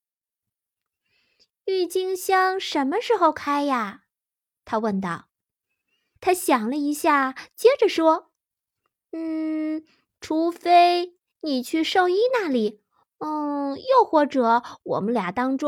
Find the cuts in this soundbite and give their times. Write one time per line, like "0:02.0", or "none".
0:06.2
0:13.0